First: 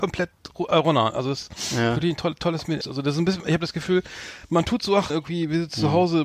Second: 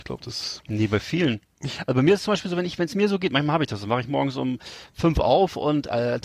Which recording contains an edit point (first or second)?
first